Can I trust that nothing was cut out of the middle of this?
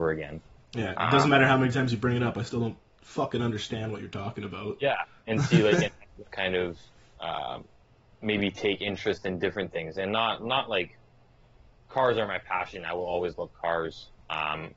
no; 1 cut; at 6.3 s

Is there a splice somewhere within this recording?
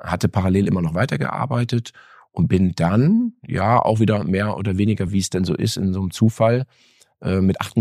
no; 0 cuts

